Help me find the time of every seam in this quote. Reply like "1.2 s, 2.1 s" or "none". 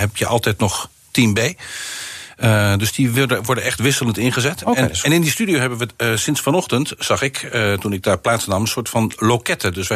none